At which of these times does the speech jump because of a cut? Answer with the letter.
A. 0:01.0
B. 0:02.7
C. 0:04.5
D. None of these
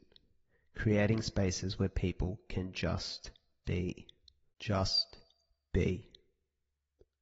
C